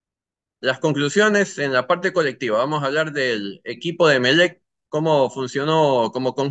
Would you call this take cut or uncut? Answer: uncut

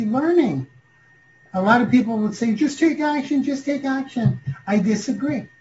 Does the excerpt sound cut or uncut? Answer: uncut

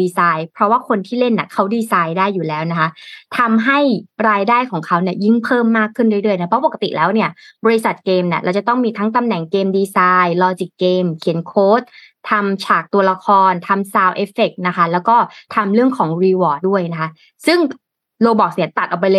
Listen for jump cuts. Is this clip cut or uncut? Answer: cut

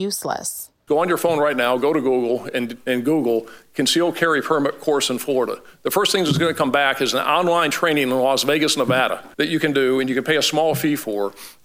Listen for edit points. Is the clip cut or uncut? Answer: cut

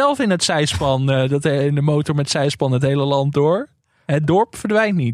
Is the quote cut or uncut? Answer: uncut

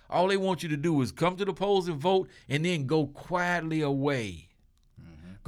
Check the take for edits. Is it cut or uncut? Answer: uncut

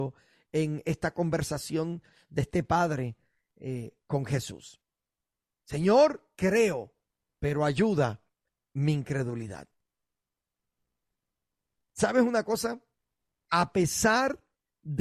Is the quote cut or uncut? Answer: uncut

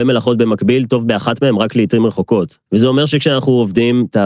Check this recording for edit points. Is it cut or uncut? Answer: cut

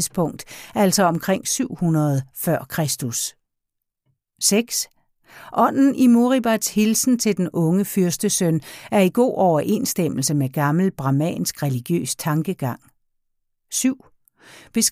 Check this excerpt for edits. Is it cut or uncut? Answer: uncut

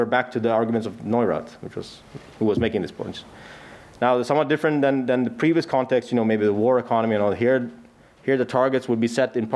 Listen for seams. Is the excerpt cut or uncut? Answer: uncut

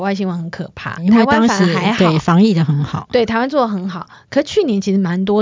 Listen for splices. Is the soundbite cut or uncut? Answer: cut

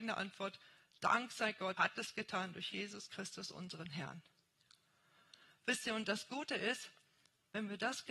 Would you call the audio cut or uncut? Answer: cut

